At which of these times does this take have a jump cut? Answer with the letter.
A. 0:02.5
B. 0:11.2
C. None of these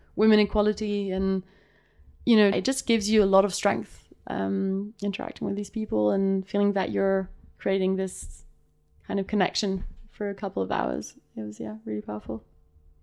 A